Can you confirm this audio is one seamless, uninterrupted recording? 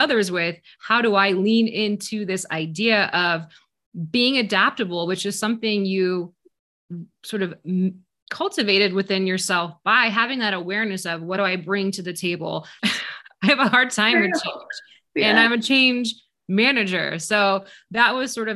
no; 1 cut; at 12.8 s

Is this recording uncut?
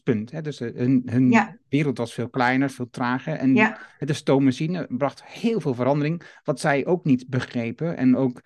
yes; 0 cuts

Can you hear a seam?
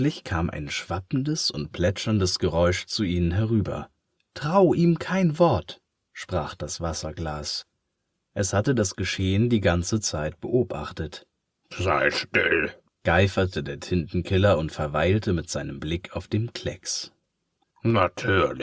yes; 2 cuts; at 12.9 s, 17.6 s

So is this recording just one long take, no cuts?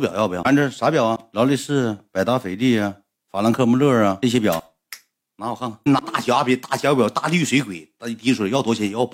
yes; 0 cuts

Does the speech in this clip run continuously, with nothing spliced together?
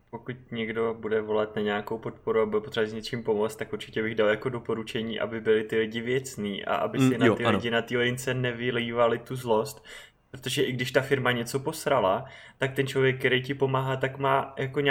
yes; 0 cuts

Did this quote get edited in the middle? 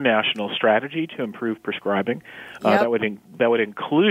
no; 0 cuts

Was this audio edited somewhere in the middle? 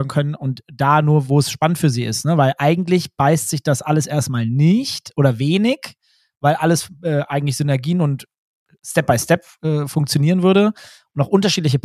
no; 0 cuts

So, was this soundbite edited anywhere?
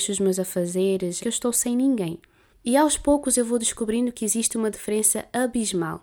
yes; 2 cuts; at 1.2 s, 2.5 s

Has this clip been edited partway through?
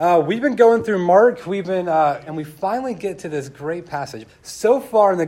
yes; 2 cuts; at 2.3 s, 4.3 s

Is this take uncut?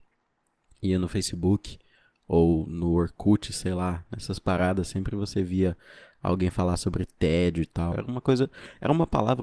no; 1 cut; at 7.9 s

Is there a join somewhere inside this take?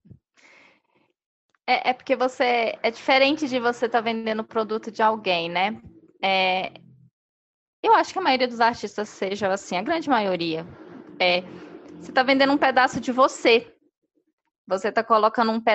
no; 0 cuts

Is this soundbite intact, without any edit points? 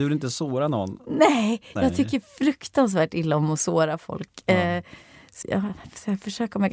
no; 1 cut; at 5.4 s

